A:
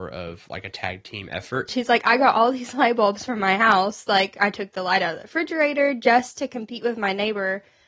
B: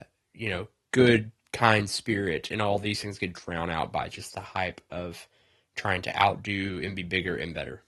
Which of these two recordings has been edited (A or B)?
A